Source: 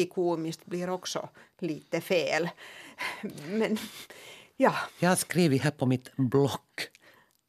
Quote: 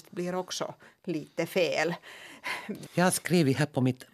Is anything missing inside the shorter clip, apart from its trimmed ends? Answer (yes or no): yes